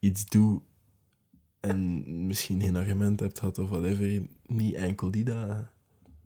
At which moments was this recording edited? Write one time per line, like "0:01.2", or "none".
none